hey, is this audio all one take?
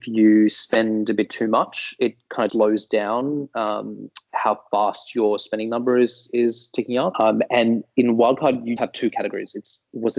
no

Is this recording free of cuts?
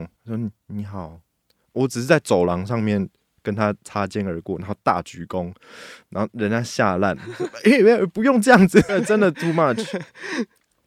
no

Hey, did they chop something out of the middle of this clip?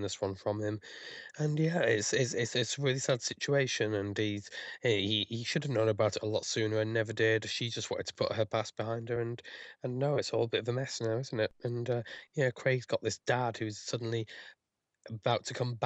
no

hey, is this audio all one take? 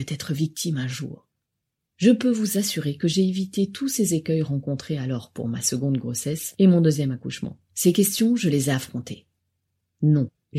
yes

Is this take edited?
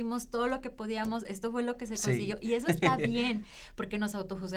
no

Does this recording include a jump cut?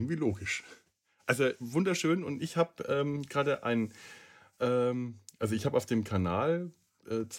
no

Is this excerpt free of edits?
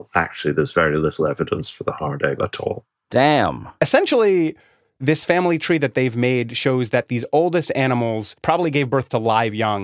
yes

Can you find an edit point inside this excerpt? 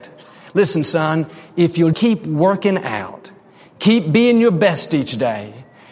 yes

